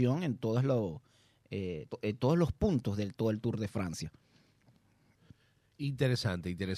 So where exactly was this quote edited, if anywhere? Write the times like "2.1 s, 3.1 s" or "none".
1.9 s